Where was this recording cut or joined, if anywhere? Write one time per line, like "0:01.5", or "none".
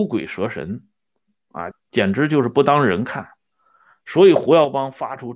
0:01.7